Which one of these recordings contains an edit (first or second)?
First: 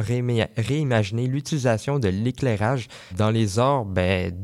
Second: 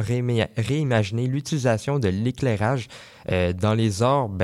first